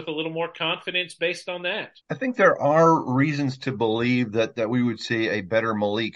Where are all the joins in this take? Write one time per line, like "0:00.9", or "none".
0:02.0